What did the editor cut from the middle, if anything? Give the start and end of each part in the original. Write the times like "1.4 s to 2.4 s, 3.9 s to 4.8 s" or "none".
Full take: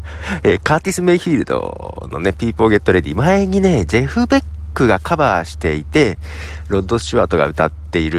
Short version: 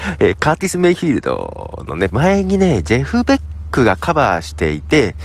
2.3 s to 3.1 s